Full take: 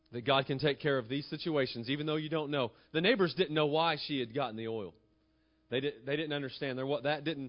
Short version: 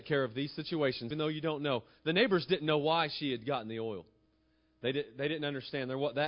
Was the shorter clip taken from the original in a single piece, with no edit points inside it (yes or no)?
no